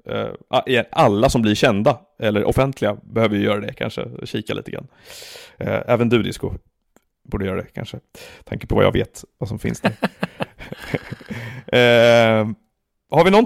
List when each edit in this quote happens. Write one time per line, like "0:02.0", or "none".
none